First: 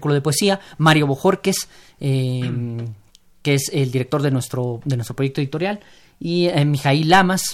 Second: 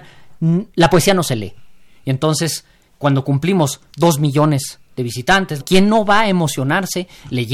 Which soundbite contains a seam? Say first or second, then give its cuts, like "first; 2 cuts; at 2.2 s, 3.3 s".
second; 1 cut; at 5.6 s